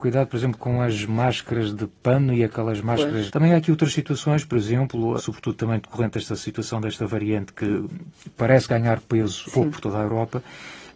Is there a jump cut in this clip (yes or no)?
yes